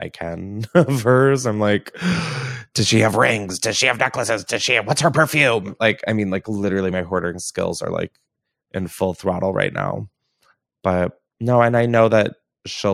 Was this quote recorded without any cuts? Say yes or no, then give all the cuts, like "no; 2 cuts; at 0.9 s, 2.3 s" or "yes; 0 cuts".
yes; 0 cuts